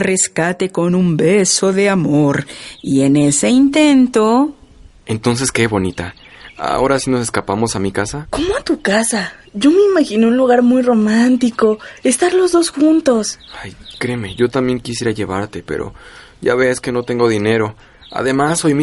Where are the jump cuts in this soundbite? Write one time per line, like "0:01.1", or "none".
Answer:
none